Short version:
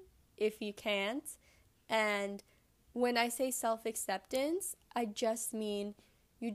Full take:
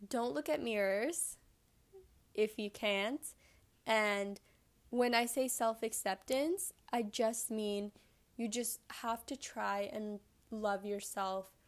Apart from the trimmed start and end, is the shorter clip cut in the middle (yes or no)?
no